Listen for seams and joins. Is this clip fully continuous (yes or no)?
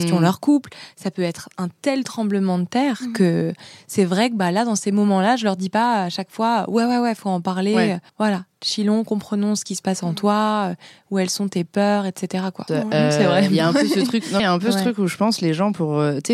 no